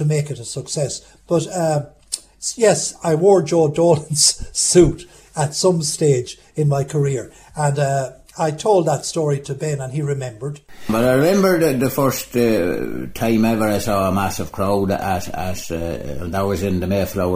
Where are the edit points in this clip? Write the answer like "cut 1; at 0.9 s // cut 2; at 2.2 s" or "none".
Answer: none